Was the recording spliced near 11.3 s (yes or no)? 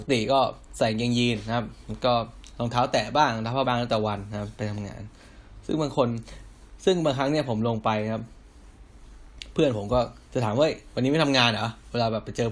no